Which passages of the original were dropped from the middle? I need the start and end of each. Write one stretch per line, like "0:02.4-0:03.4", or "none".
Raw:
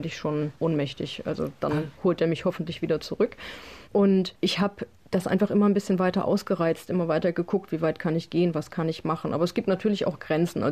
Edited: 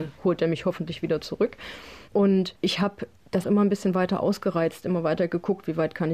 0:05.2-0:05.5